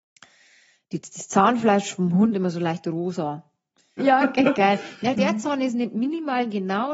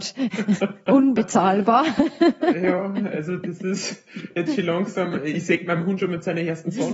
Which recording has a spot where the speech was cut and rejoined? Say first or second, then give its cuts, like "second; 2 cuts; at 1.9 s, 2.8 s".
first; 2 cuts; at 4.0 s, 5.1 s